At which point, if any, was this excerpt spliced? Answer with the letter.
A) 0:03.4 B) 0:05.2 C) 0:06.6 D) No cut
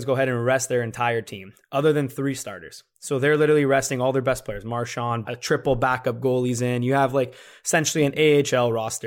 B